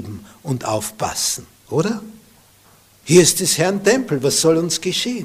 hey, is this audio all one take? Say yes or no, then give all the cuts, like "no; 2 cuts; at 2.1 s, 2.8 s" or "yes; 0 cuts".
no; 1 cut; at 3.0 s